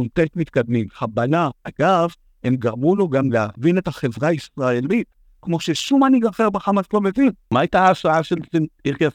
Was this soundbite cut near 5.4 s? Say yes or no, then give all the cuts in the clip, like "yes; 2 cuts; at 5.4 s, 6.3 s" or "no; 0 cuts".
no; 2 cuts; at 1.6 s, 7.4 s